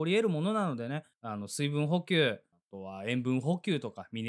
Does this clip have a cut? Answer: yes; 2 cuts; at 1.1 s, 2.5 s

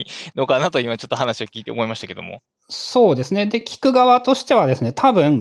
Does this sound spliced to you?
no; 0 cuts

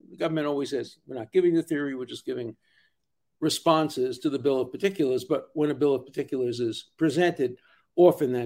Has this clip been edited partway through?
no; 0 cuts

